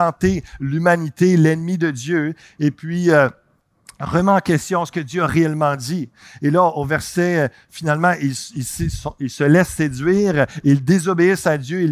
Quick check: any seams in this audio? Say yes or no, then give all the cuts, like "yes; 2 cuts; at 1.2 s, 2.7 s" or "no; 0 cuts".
no; 0 cuts